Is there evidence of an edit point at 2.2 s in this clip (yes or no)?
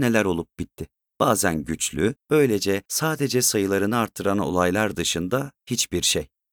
yes